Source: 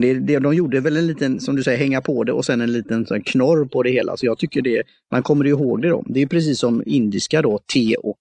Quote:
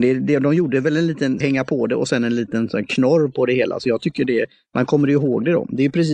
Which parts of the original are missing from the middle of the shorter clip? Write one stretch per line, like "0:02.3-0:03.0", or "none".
0:01.4-0:01.8

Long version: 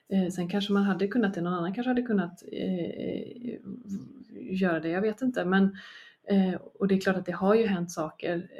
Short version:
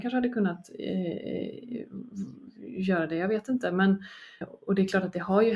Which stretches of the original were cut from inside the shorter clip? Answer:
0:06.1-0:06.5

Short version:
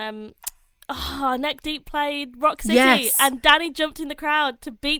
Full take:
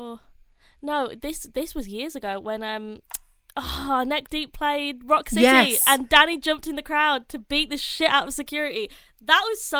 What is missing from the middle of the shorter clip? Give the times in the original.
none

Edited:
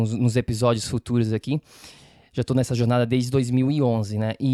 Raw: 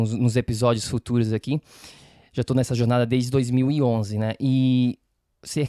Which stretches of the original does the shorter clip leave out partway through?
none

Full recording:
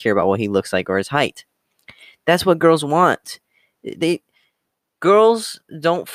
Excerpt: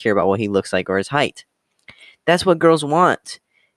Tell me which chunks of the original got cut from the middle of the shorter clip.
none

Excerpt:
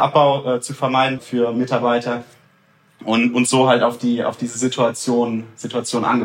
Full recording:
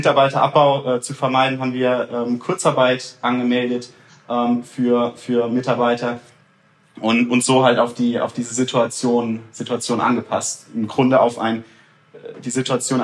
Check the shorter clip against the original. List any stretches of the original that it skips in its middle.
0:01.6-0:05.1

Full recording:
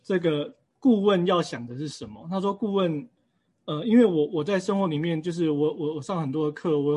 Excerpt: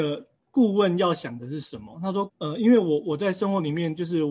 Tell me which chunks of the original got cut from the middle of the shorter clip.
0:02.5-0:03.5

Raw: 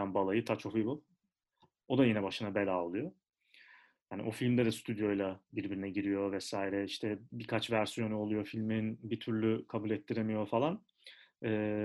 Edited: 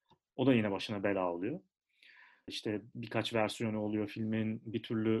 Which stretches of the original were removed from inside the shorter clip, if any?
0:04.0-0:06.9

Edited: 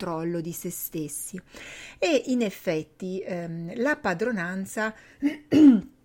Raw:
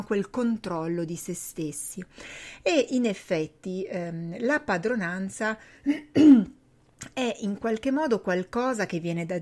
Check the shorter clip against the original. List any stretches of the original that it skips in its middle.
none

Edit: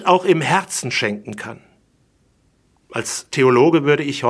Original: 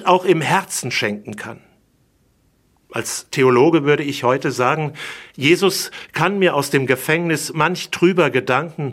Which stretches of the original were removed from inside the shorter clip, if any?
none

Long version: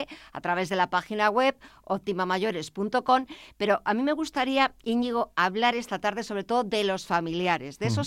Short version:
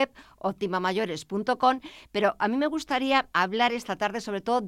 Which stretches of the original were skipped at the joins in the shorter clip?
0:04.8-0:05.3

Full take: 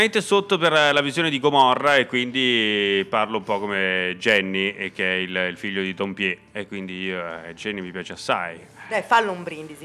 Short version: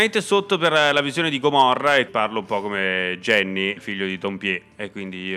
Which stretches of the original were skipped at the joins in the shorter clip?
0:02.1-0:03.1
0:04.7-0:05.5

